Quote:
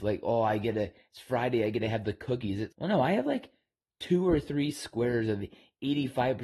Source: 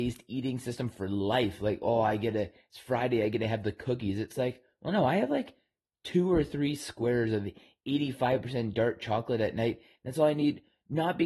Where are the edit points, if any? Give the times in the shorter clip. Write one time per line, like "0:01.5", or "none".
0:02.7

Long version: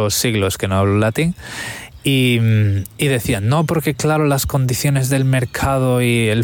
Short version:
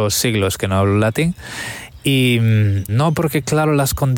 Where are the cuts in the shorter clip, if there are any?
0:02.9

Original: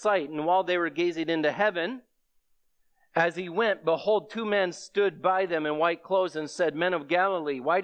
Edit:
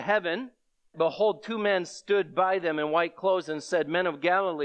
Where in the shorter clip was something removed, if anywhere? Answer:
0:00.9

